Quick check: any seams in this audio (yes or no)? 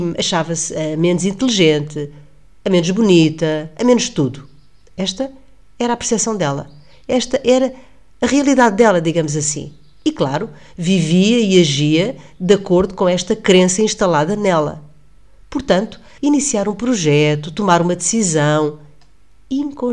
yes